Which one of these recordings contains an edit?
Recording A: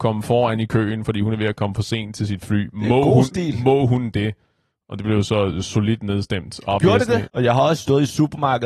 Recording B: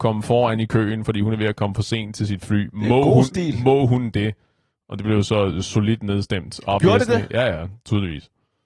A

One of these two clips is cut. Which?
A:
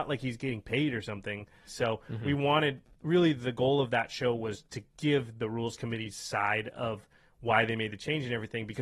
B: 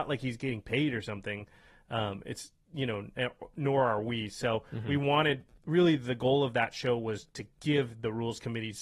A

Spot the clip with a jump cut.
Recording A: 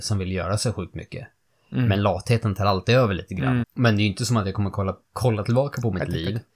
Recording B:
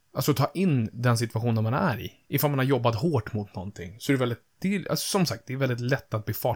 A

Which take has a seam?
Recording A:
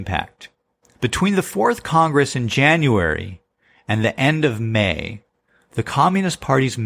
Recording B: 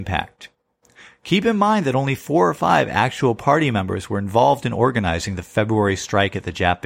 A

